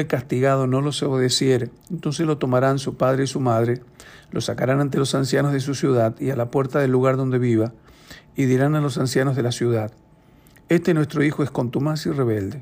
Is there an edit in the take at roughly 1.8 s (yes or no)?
yes